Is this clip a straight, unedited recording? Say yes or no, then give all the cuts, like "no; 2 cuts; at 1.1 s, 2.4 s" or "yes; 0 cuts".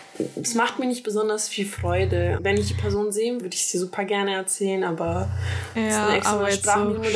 no; 2 cuts; at 2.4 s, 3.4 s